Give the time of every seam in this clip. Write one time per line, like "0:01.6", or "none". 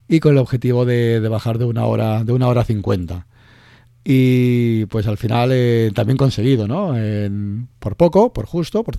none